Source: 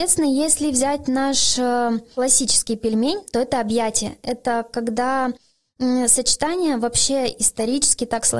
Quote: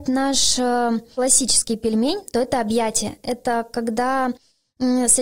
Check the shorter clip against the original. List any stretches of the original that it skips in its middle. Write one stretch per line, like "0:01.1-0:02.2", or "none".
none